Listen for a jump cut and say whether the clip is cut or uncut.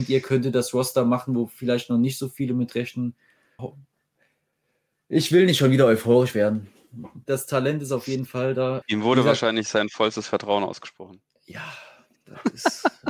cut